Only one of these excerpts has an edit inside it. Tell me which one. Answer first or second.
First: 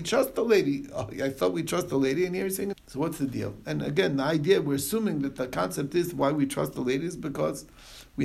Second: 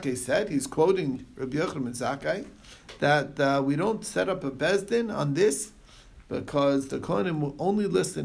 first